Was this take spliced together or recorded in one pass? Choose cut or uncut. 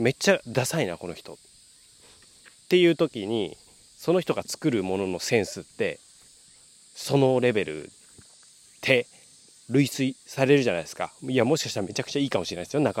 uncut